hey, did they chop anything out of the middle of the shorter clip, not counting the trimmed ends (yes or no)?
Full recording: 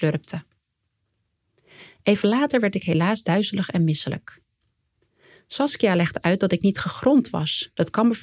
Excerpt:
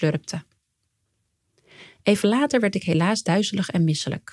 no